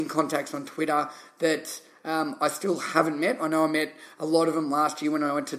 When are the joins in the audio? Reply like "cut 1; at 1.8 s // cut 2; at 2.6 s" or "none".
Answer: none